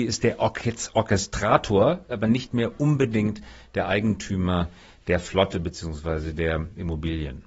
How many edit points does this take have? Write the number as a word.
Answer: one